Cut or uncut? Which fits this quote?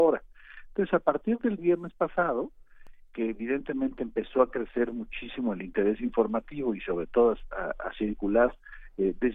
uncut